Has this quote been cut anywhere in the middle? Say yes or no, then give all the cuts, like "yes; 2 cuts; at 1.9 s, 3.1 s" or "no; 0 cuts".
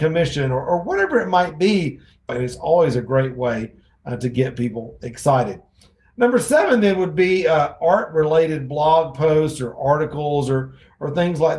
yes; 1 cut; at 2.3 s